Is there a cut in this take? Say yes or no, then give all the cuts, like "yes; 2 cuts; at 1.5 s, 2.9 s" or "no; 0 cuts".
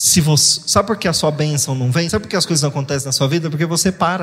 no; 0 cuts